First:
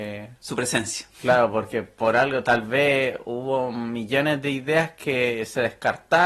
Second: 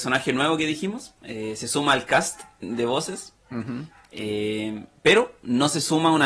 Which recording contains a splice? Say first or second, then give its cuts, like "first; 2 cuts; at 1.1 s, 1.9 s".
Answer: second; 1 cut; at 1.2 s